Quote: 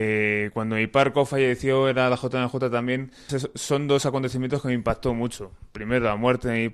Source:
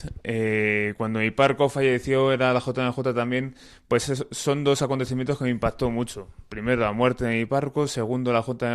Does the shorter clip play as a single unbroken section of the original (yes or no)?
no